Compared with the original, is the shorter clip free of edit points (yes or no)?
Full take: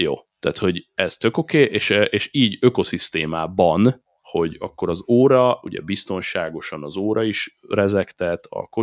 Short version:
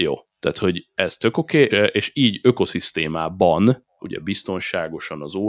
no